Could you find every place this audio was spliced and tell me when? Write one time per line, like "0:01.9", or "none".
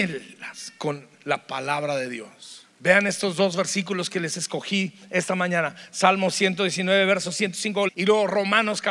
0:07.9

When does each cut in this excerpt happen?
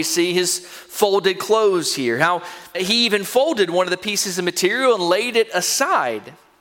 0:02.7

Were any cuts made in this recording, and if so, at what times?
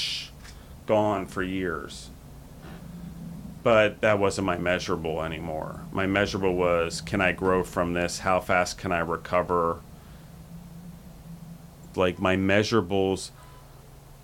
0:11.9

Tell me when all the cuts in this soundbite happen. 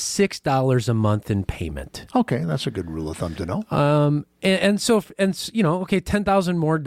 none

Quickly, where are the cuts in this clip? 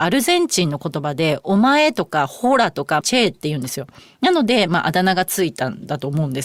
0:03.0
0:04.7

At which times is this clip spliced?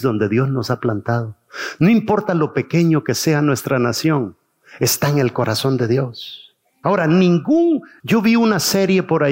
0:06.8
0:08.0

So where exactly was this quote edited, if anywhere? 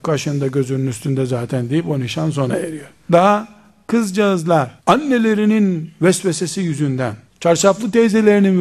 0:03.1
0:04.8
0:07.3

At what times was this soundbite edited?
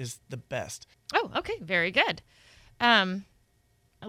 0:00.9

